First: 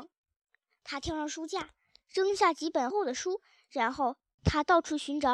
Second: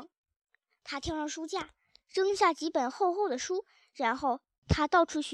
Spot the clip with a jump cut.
first; 1 cut; at 2.9 s

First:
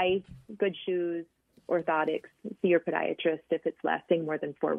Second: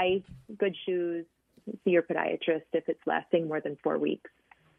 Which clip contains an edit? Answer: second; 1 cut; at 1.6 s

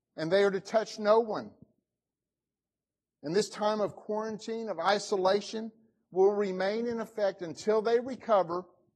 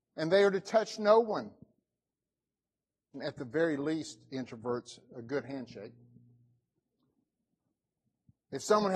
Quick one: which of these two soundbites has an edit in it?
second; 1 cut; at 3.1 s

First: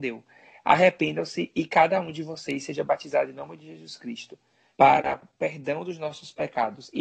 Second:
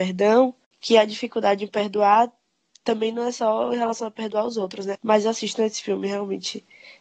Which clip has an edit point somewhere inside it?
second; 1 cut; at 4.9 s

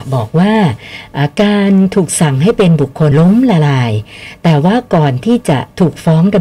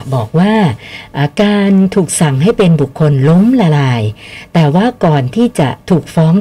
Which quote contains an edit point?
first; 1 cut; at 3.1 s

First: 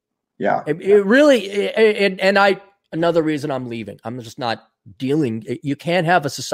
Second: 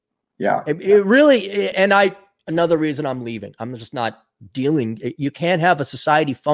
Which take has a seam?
second; 1 cut; at 1.7 s

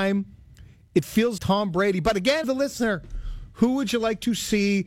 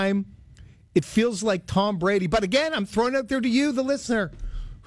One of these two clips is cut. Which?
first; 2 cuts; at 1.4 s, 2.4 s

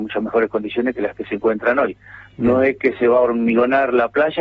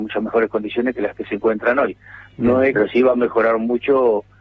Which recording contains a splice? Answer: second; 1 cut; at 2.7 s

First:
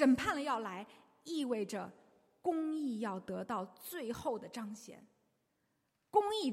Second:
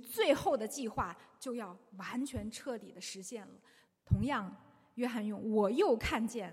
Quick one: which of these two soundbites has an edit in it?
second; 1 cut; at 3.9 s

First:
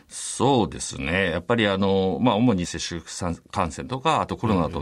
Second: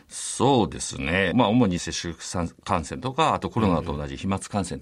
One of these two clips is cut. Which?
second; 1 cut; at 1.3 s

